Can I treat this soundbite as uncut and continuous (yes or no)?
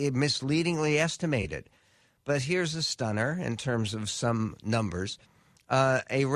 yes